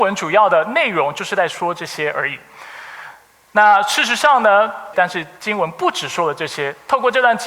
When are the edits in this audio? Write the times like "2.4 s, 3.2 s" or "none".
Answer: 4.9 s